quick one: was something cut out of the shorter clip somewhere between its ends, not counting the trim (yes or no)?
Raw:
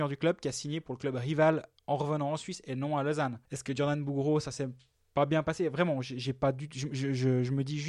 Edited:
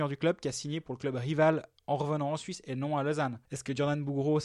no